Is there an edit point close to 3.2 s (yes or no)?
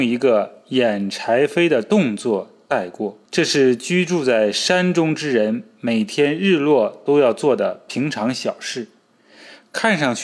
yes